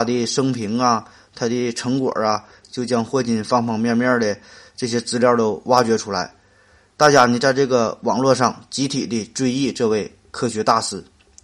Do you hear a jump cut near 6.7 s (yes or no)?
no